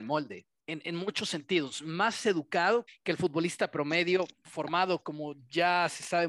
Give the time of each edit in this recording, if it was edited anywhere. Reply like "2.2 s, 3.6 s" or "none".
2.9 s

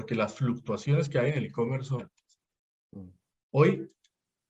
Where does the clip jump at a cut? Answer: 2.0 s, 3.3 s

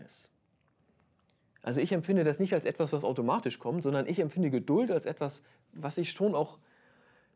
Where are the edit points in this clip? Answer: none

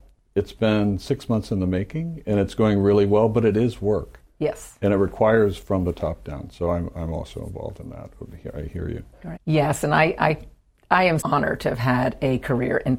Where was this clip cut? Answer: 9.4 s, 11.2 s

